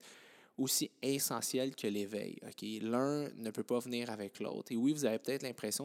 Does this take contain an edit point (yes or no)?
no